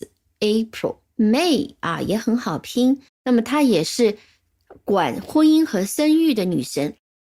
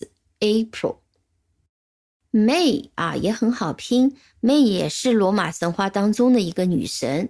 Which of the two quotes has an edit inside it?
first; 2 cuts; at 1.1 s, 3.1 s

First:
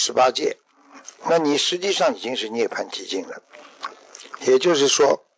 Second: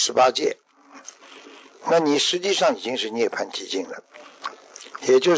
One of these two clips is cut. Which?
first; 1 cut; at 1.2 s

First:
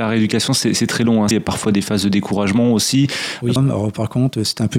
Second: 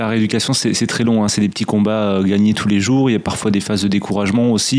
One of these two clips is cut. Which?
first; 2 cuts; at 1.3 s, 3.6 s

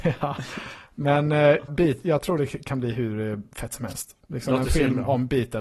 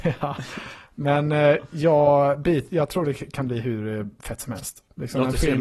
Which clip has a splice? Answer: first; 1 cut; at 1.7 s

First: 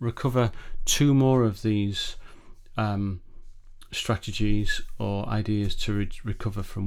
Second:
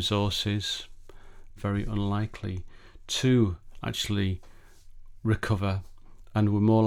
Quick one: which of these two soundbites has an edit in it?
second; 1 cut; at 1.6 s

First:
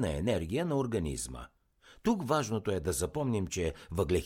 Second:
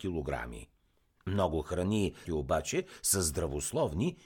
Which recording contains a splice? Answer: second; 1 cut; at 2.2 s

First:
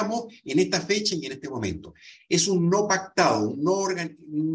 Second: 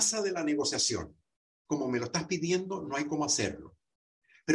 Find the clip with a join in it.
second; 1 cut; at 1.7 s

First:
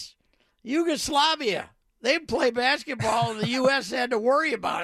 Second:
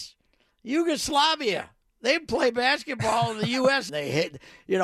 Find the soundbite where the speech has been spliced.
second; 1 cut; at 3.9 s

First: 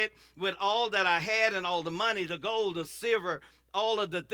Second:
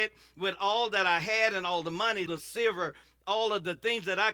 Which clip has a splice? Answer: second; 1 cut; at 2.3 s

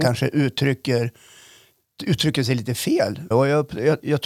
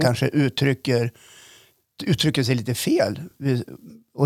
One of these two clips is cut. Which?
first; 1 cut; at 3.3 s

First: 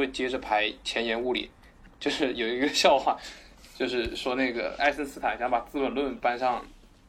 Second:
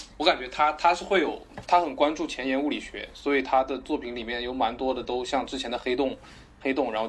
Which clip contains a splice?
first; 1 cut; at 4.8 s

